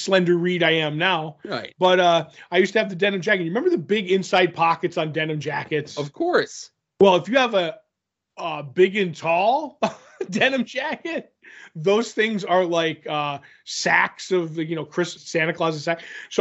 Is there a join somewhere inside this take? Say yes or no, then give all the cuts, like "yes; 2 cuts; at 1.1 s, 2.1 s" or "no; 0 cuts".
yes; 1 cut; at 15.2 s